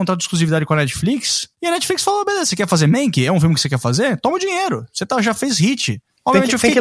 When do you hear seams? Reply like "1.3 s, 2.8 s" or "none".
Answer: 1.5 s